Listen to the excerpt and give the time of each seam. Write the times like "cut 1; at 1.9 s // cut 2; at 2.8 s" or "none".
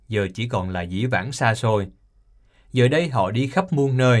none

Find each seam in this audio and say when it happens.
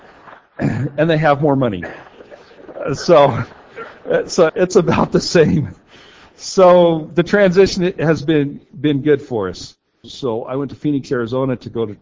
cut 1; at 4.5 s // cut 2; at 10.0 s

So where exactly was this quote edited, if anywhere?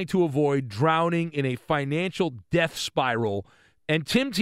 none

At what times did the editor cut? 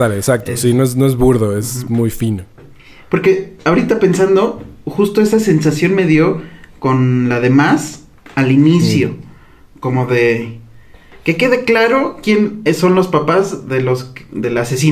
none

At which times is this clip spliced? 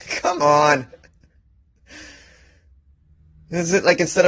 none

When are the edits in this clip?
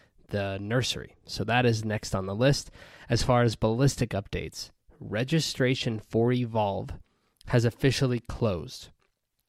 none

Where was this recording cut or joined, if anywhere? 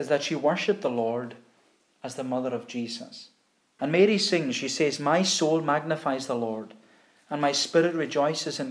cut 1; at 3.8 s

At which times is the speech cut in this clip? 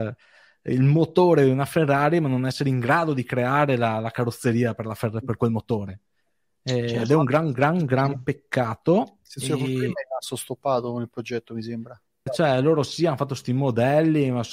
cut 1; at 12.3 s

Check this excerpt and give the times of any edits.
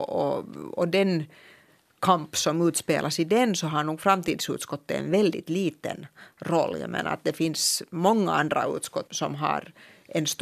cut 1; at 9.1 s

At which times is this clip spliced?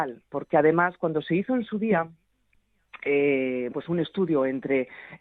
cut 1; at 3.7 s

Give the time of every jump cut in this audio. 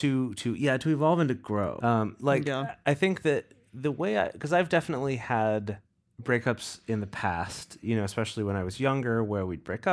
cut 1; at 1.8 s

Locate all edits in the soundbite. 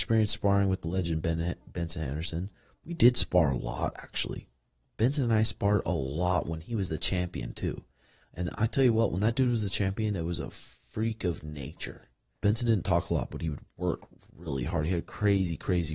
cut 1; at 12.4 s

